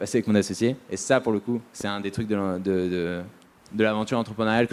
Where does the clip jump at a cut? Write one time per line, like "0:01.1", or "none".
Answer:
0:01.7